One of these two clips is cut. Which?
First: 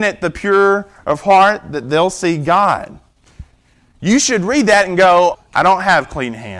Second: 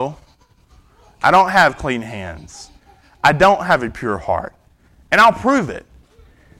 first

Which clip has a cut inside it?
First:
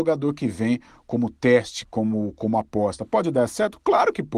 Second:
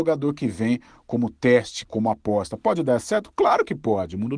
second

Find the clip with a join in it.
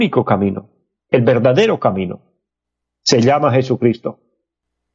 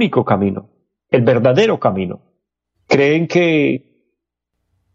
second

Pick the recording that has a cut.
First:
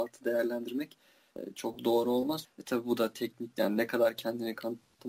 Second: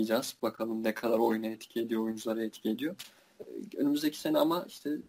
first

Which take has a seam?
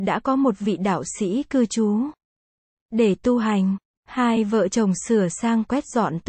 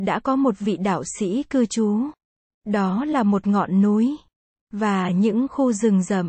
second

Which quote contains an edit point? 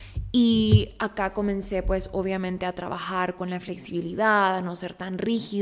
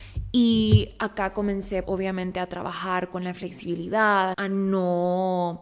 second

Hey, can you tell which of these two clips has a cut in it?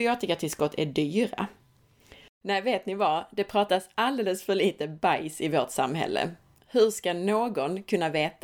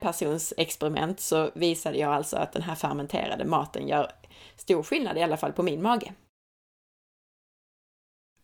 first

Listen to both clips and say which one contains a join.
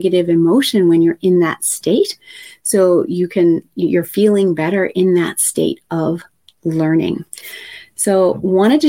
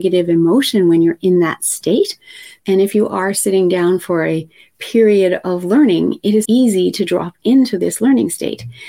second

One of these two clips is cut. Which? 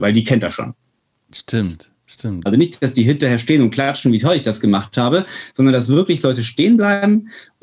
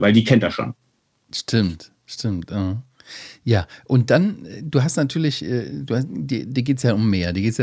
first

